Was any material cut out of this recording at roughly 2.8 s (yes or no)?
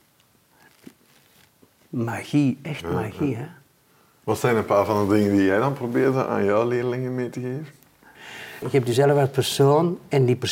no